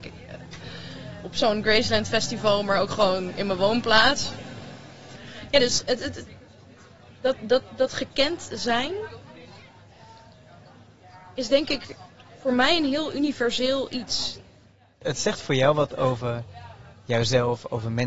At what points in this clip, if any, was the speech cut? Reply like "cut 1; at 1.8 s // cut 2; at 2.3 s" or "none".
none

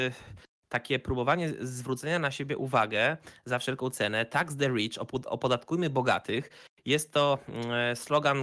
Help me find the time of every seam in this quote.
none

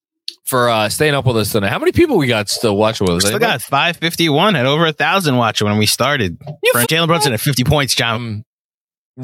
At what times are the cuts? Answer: cut 1; at 6.8 s // cut 2; at 8.1 s

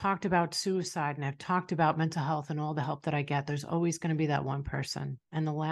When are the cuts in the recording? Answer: none

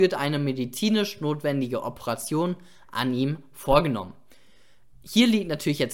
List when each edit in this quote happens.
none

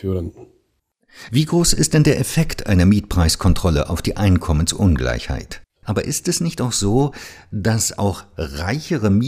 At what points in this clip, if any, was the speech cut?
cut 1; at 1.3 s // cut 2; at 5.8 s

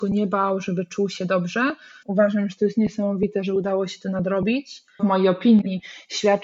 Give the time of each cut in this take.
cut 1; at 2.0 s // cut 2; at 5.0 s

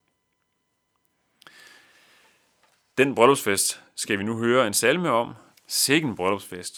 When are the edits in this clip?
cut 1; at 5.5 s

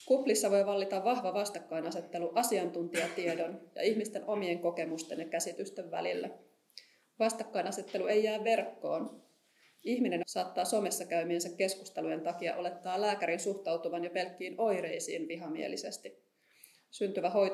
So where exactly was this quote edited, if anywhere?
cut 1; at 10.2 s

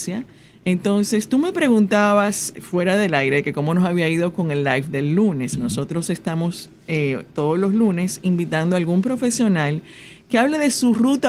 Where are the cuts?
cut 1; at 2.5 s

